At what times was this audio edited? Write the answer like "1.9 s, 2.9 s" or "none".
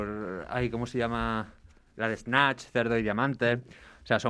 none